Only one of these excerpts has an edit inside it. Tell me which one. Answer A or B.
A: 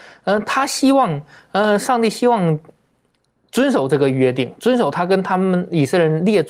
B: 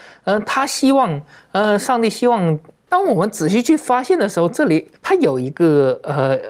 B